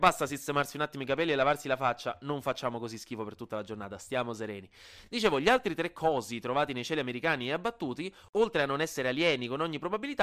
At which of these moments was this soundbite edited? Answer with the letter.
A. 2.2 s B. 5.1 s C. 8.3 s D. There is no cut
D